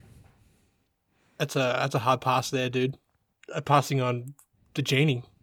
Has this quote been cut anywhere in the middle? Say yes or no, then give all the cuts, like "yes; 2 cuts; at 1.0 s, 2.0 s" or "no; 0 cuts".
yes; 1 cut; at 3.3 s